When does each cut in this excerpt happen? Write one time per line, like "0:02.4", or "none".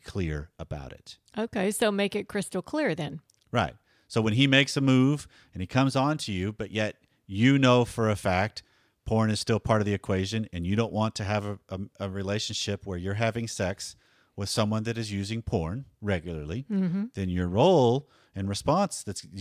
none